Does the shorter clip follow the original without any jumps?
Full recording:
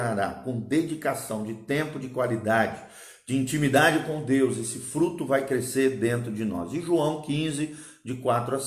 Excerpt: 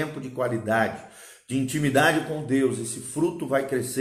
yes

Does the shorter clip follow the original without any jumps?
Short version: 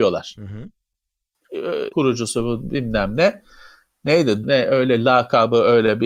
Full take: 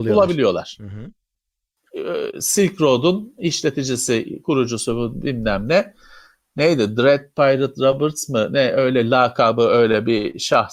no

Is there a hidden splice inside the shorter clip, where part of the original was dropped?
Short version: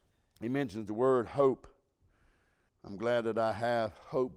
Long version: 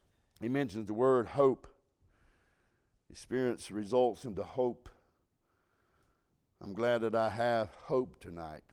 yes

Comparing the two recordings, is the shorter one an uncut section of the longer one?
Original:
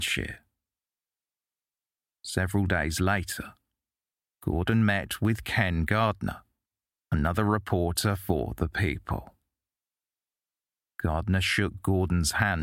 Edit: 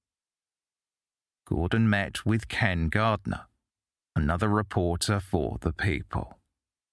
no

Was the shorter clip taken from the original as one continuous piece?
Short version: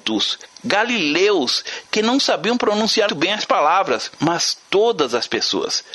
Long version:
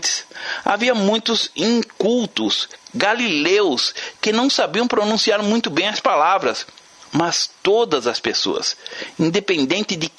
no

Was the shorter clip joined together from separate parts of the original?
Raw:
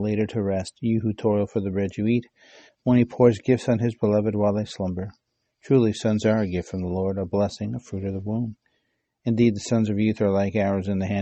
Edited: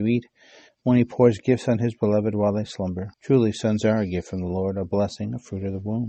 yes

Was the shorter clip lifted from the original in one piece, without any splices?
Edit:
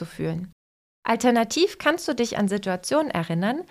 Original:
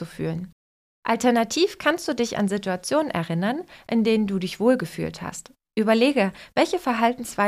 yes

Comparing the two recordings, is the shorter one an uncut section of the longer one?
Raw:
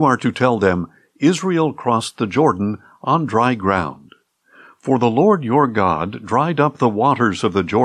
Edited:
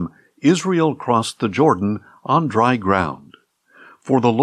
yes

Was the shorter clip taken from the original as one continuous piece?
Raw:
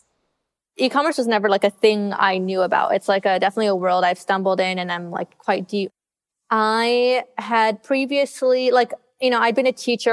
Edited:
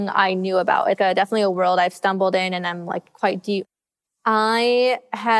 no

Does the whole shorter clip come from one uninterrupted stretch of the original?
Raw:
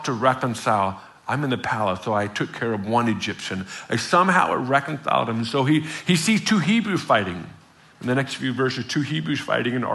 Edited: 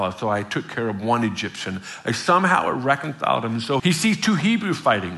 no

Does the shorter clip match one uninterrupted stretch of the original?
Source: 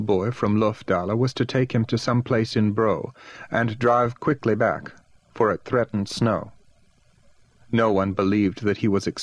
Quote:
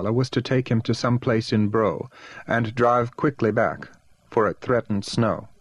yes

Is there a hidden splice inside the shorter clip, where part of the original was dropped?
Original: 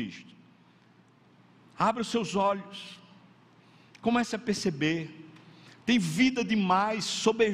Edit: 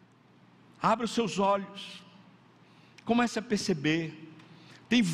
no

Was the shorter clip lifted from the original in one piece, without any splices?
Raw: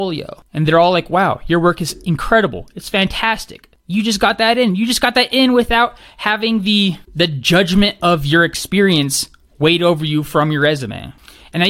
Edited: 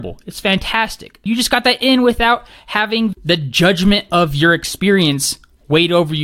no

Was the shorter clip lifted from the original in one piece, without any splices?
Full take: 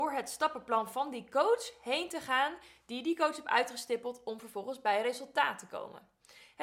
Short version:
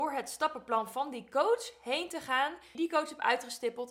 no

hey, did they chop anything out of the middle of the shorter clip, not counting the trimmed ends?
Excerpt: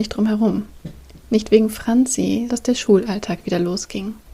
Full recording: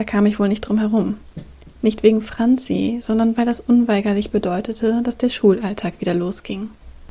yes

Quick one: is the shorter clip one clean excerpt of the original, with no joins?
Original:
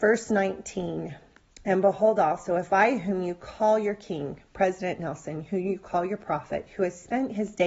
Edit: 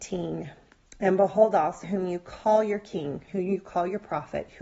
no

